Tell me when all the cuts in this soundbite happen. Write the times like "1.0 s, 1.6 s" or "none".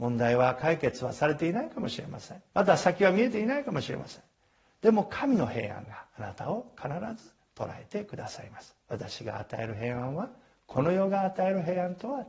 2.5 s, 6.1 s, 8.8 s